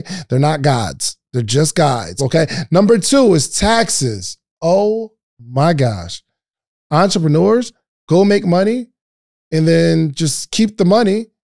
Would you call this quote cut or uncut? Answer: cut